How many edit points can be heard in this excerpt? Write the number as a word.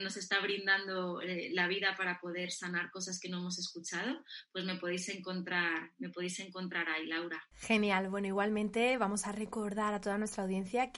one